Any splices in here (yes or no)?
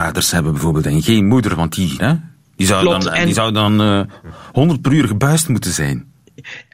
yes